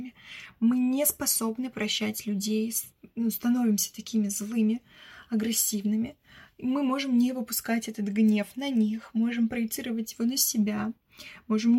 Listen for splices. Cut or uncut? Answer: uncut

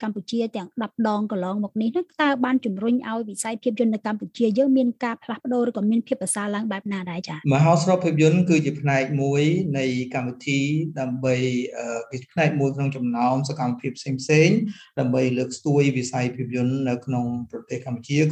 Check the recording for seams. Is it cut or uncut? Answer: cut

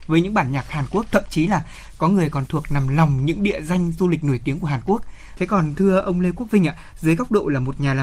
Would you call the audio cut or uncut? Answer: cut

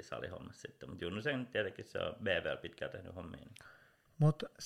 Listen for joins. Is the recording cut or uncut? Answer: uncut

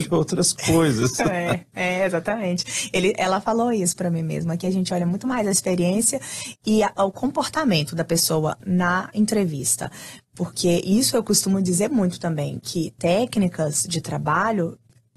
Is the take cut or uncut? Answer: uncut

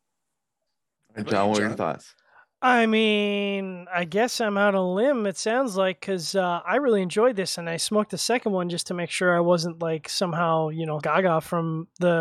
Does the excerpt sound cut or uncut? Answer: cut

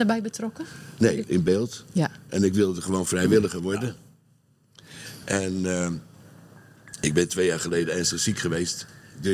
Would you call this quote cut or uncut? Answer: cut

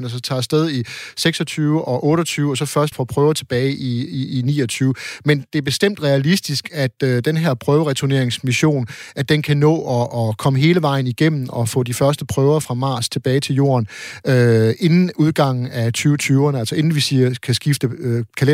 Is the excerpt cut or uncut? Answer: cut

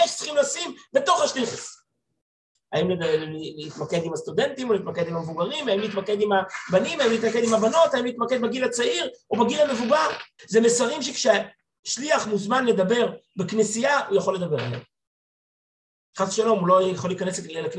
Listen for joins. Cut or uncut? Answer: cut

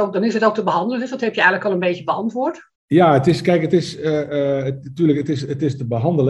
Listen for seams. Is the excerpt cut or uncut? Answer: cut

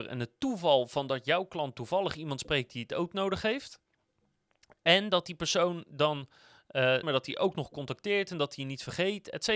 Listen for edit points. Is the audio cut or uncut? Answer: cut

